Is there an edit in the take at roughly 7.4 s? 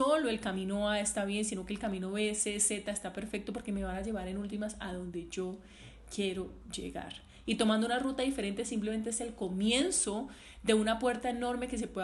yes; 1 cut; at 7.4 s

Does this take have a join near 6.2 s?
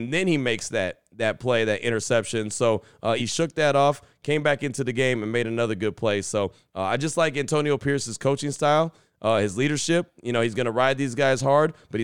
no; 1 cut; at 3.2 s

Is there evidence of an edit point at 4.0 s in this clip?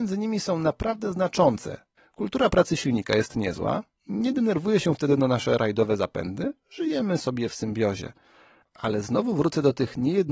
no; 2 cuts; at 2.0 s, 8.6 s

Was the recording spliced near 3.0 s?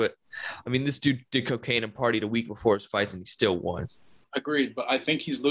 no; 1 cut; at 4.2 s

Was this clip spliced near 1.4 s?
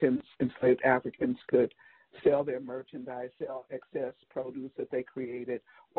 no; 0 cuts

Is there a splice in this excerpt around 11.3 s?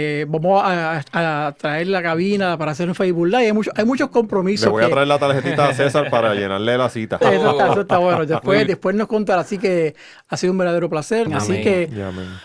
yes; 3 cuts; at 7.2 s, 8.7 s, 11.3 s

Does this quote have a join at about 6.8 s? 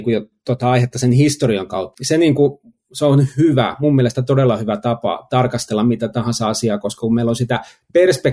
no; 1 cut; at 1.9 s

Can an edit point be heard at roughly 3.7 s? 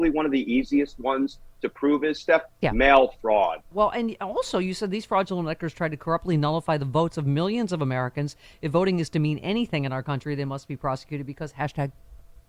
yes; 1 cut; at 3.7 s

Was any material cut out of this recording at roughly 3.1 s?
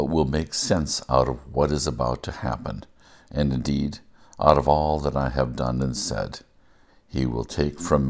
no; 1 cut; at 6.9 s

